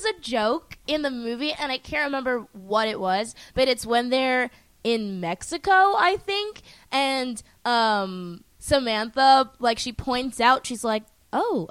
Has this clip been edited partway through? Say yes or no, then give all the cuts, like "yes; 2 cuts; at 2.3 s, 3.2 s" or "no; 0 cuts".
no; 0 cuts